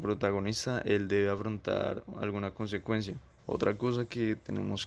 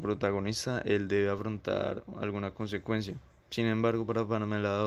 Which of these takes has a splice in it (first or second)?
first